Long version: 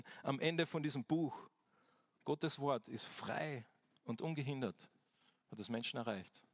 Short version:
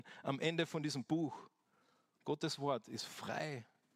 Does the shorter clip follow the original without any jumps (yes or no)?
yes